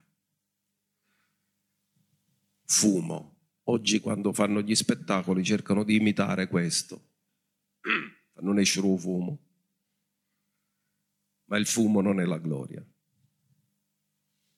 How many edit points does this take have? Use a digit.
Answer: 0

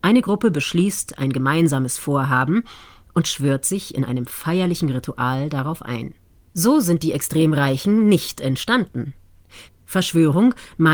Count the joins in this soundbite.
2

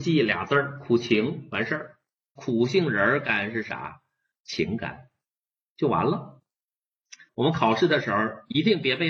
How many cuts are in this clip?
2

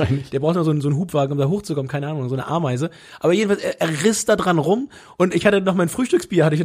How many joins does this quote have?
0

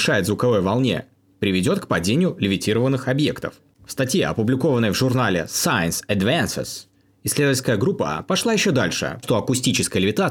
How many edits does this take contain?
1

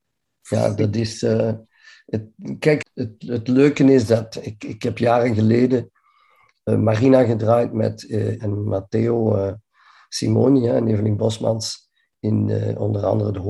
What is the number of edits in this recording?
2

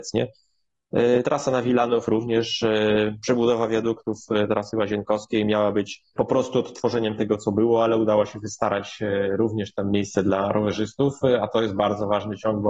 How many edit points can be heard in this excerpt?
0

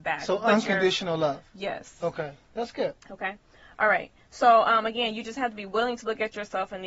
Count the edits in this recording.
1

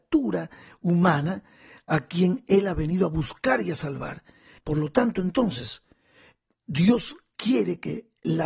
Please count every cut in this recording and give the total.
1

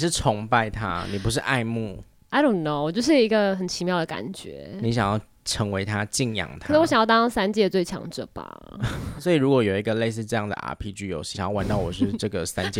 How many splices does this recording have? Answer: 1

